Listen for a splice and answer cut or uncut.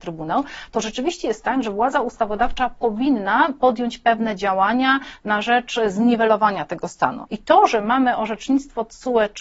cut